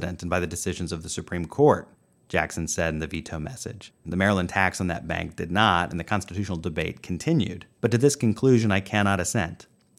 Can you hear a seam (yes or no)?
yes